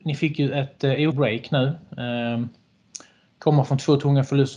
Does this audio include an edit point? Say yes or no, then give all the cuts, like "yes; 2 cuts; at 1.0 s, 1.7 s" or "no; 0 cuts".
yes; 1 cut; at 1.1 s